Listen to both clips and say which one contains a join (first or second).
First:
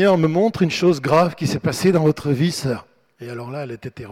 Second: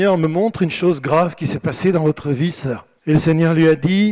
second